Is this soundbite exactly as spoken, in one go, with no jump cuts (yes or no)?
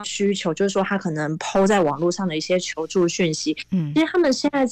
yes